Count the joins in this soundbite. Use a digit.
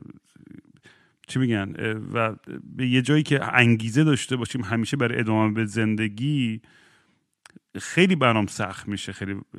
0